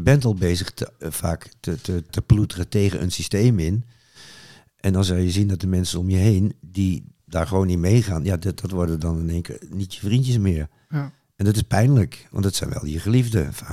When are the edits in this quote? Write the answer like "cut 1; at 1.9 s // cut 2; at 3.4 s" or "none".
cut 1; at 2.1 s